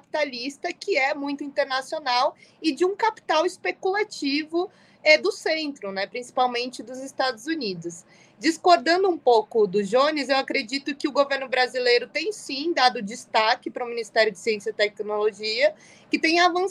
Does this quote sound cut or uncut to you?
uncut